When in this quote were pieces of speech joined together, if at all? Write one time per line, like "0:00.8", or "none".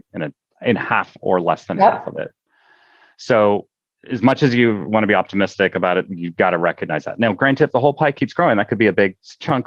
none